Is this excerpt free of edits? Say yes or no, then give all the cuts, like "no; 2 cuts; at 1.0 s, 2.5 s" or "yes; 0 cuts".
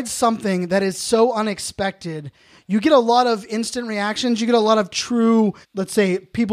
no; 1 cut; at 5.6 s